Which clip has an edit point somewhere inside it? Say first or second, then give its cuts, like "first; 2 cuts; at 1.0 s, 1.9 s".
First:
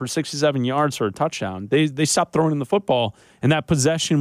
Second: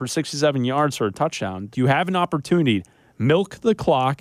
second; 1 cut; at 1.7 s